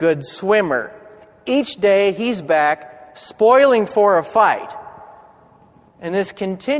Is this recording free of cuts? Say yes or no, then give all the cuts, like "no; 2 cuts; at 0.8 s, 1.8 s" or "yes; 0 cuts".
yes; 0 cuts